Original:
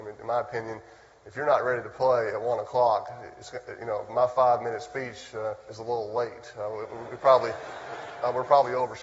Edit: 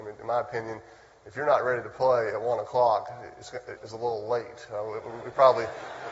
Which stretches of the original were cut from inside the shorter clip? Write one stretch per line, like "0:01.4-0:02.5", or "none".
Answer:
0:03.8-0:05.6